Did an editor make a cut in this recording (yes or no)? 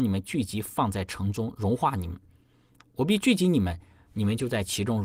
yes